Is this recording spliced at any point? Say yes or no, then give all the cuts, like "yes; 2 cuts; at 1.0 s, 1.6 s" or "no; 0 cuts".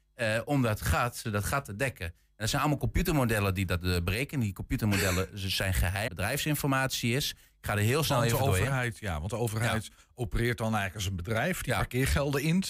yes; 2 cuts; at 1.2 s, 6.1 s